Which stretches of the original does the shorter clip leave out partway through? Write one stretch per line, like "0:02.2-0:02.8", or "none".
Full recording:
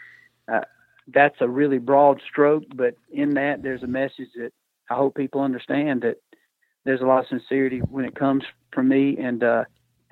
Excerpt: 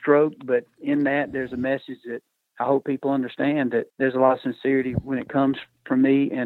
0:06.2-0:06.8